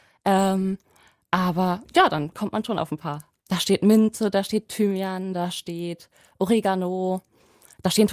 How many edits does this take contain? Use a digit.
1